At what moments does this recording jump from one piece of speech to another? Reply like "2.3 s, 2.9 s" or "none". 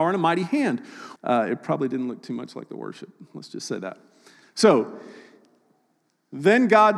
1.2 s